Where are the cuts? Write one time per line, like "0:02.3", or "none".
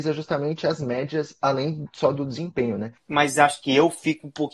0:03.0